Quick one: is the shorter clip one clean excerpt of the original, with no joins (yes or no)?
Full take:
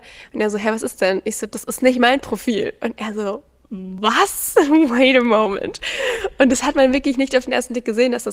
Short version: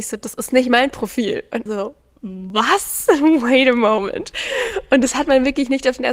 no